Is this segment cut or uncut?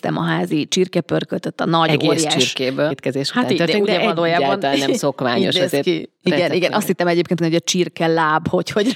cut